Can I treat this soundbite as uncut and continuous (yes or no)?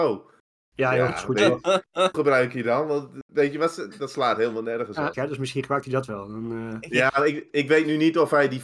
no